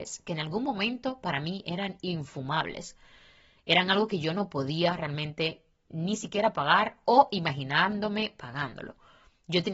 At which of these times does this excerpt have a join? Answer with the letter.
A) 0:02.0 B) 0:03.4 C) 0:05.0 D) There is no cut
D